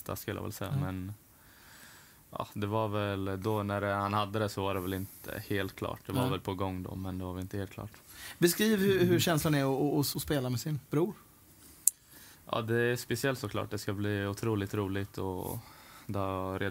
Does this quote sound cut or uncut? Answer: cut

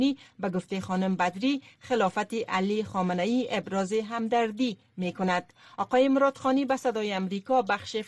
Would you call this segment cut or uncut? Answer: uncut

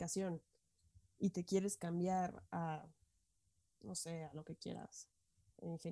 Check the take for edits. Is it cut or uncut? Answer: uncut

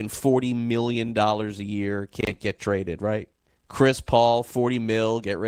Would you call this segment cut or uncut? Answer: cut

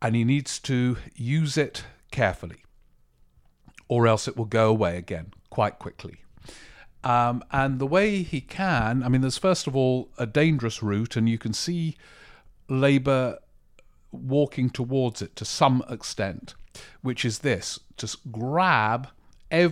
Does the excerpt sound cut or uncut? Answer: uncut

